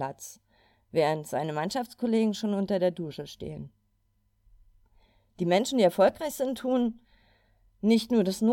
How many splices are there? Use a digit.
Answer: 0